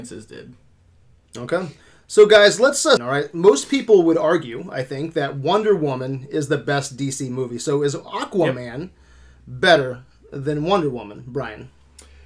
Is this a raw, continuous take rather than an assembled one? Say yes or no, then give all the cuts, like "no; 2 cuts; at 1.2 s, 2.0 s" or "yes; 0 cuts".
no; 1 cut; at 3.0 s